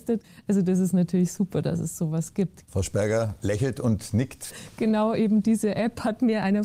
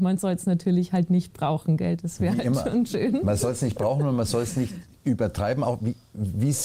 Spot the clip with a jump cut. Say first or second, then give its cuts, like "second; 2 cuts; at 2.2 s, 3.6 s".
first; 2 cuts; at 2.6 s, 4.5 s